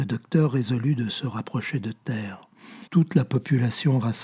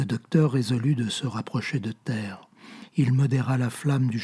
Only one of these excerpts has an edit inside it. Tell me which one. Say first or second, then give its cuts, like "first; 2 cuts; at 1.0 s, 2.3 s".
first; 1 cut; at 2.9 s